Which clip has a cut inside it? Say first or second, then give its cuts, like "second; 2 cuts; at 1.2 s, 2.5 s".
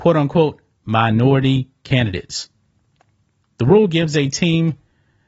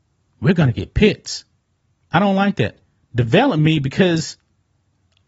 second; 1 cut; at 2.1 s